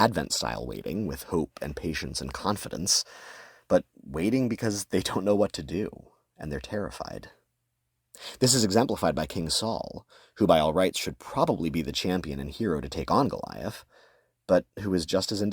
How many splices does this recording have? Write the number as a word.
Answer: zero